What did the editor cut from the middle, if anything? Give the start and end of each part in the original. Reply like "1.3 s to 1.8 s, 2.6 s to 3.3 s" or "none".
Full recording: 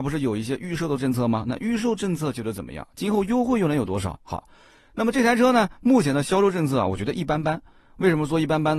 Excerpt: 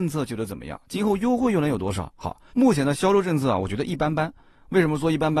4.6 s to 5.8 s